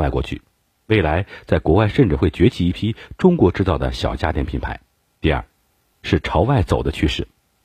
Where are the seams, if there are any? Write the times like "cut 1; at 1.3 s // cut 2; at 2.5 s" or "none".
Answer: none